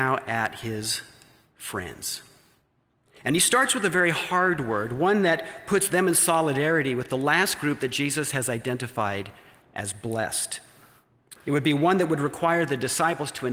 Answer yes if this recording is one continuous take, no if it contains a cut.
no